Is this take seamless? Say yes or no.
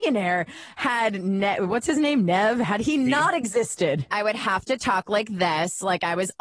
no